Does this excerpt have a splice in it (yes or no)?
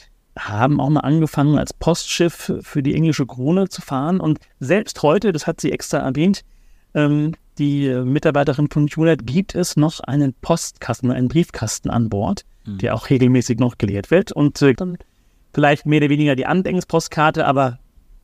yes